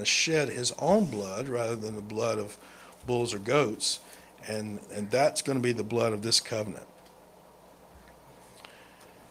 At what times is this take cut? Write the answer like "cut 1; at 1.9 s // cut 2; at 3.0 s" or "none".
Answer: none